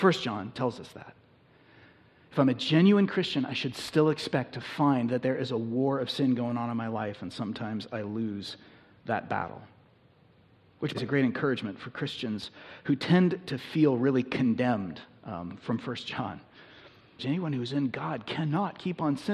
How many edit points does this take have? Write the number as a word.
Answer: two